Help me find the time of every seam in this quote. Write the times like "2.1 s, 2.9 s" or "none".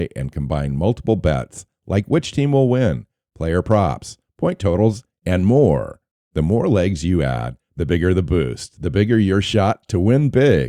none